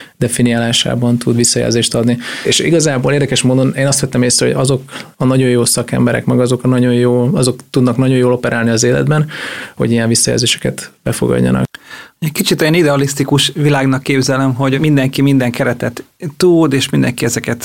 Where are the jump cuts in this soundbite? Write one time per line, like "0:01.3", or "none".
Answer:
0:09.8